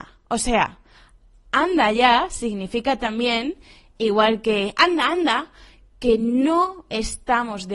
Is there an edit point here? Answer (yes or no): no